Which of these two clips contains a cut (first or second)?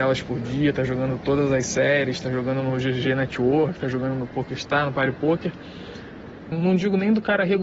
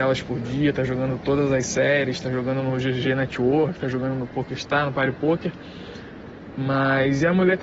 first